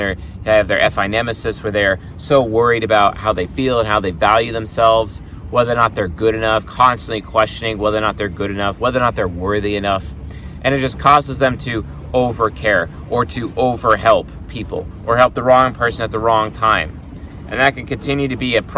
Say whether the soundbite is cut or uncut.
uncut